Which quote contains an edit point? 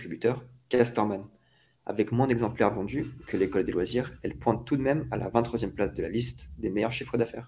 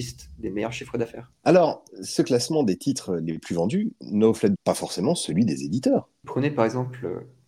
second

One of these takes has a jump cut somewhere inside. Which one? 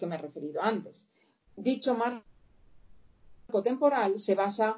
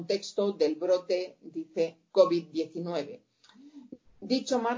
first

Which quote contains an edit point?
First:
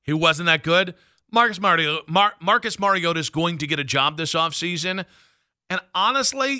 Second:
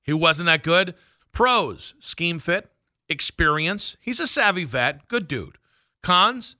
second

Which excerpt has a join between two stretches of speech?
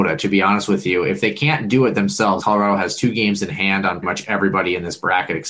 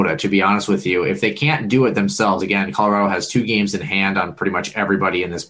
first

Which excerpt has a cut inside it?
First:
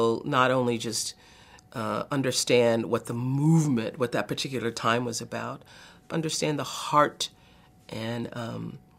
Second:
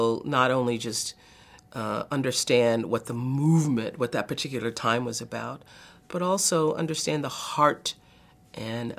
first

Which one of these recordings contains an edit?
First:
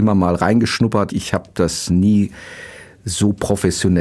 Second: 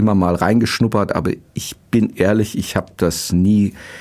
first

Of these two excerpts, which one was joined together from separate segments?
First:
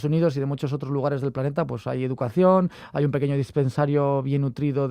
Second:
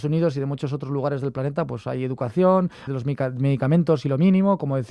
second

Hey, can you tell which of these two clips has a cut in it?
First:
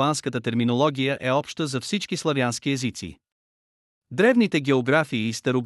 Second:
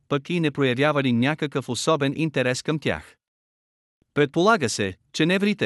second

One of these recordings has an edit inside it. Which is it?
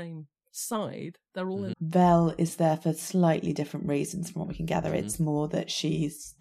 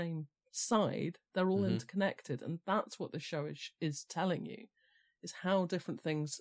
first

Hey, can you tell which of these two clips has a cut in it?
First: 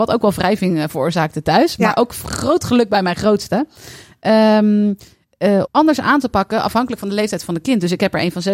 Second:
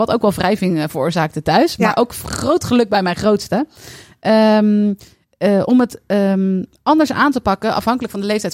first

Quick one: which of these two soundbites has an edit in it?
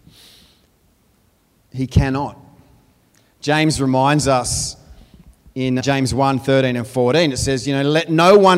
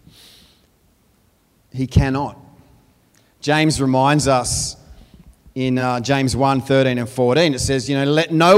first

